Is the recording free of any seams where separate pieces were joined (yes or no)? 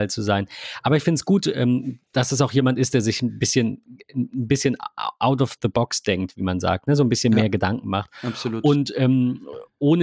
yes